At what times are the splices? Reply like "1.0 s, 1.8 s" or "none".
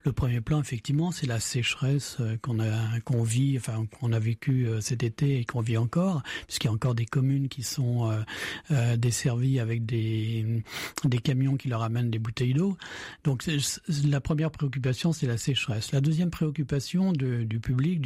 none